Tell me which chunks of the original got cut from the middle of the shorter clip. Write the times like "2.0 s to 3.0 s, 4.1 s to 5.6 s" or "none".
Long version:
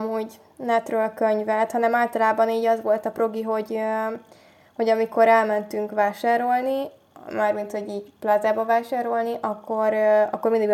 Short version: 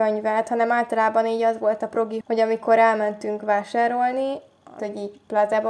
3.4 s to 4.7 s, 7.3 s to 7.7 s